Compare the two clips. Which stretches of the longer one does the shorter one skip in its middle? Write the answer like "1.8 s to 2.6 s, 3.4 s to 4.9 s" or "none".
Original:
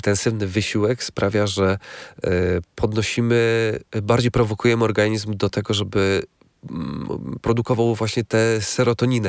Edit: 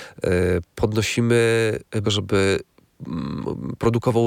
4.0 s to 5.7 s